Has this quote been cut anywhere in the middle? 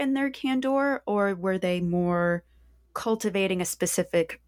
no; 0 cuts

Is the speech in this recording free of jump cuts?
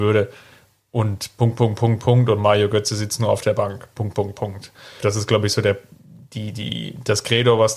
no; 1 cut; at 5.0 s

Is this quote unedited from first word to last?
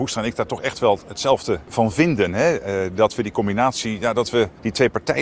yes; 0 cuts

